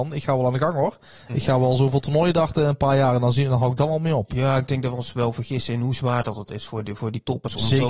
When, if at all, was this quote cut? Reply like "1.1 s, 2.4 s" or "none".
none